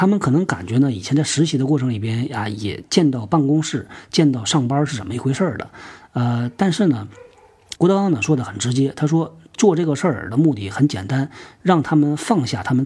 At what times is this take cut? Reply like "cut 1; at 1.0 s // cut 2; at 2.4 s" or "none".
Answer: cut 1; at 7.7 s // cut 2; at 11.6 s